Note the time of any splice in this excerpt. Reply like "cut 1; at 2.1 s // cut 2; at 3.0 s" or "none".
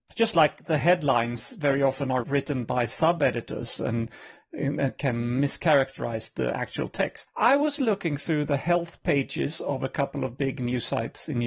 cut 1; at 7.3 s